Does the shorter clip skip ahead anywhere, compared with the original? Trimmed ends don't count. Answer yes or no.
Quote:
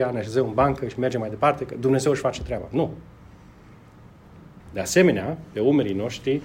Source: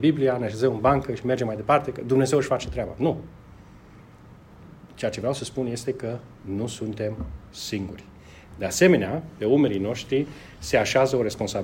yes